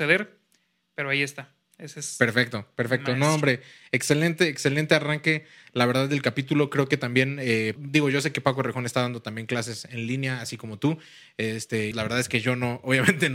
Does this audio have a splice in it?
yes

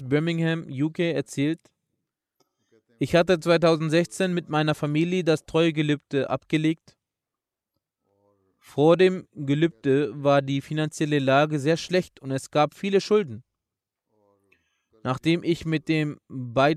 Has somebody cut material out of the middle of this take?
no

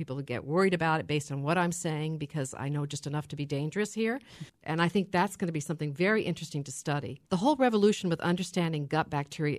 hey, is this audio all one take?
no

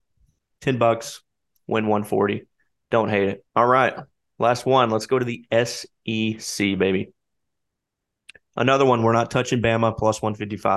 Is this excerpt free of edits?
no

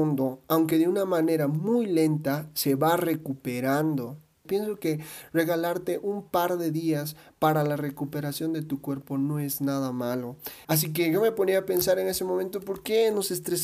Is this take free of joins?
no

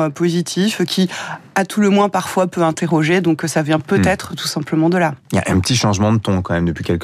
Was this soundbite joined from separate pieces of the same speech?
no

